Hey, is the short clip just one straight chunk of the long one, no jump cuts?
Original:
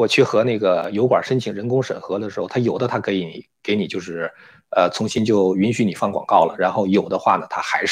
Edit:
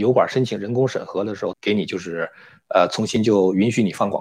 no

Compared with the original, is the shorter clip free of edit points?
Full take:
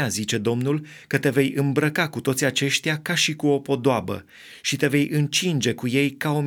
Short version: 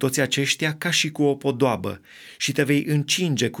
yes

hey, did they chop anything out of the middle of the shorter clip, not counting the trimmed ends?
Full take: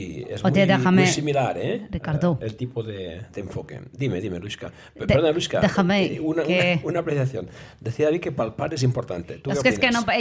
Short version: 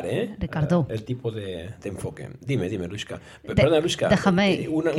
no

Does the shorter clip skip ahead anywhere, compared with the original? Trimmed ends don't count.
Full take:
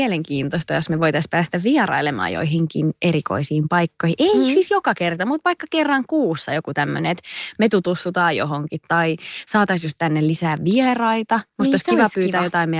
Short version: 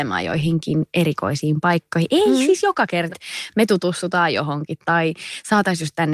yes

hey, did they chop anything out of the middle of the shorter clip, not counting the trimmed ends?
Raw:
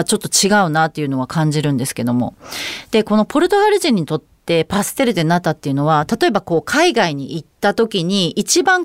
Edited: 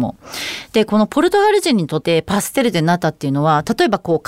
yes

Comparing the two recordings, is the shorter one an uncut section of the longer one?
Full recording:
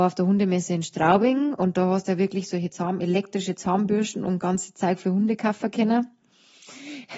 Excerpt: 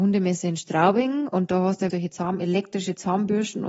no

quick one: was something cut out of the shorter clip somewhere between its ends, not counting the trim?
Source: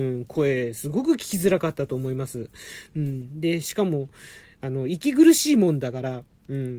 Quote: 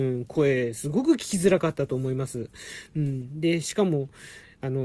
no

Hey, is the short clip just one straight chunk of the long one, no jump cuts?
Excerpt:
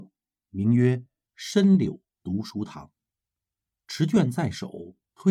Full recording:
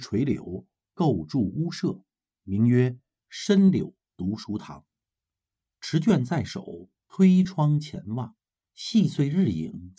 yes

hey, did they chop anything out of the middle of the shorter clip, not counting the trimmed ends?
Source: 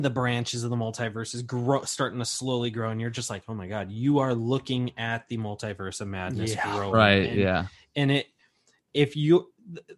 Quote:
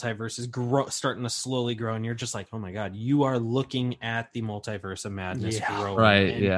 no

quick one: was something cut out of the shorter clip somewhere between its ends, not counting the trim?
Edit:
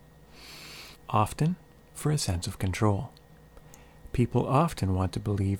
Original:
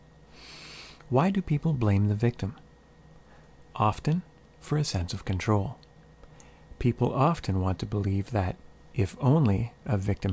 yes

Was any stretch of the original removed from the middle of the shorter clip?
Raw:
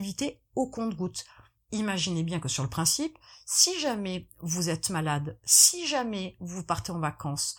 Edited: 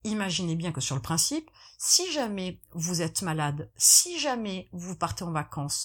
no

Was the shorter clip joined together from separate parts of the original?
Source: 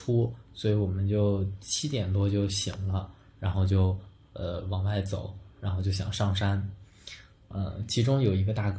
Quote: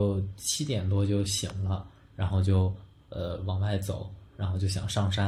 no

